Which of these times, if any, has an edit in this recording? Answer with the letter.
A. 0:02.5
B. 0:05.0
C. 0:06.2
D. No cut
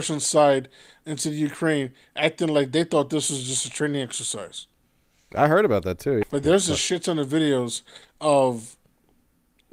C